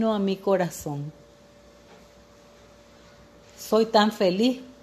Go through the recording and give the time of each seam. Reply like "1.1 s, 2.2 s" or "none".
none